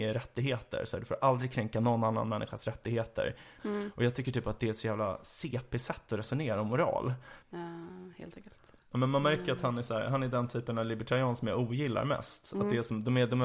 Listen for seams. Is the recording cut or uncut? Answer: cut